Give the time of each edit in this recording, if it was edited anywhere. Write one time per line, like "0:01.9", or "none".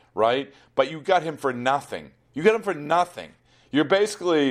none